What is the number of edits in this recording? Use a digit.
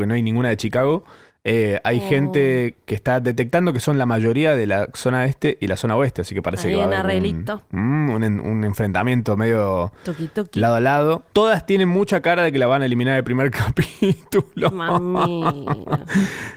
0